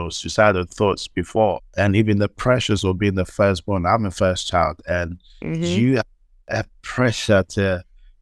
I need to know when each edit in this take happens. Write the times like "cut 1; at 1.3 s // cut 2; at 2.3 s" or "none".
cut 1; at 1.6 s